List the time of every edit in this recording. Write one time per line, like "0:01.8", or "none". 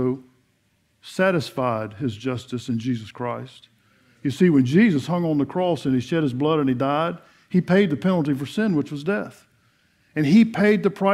none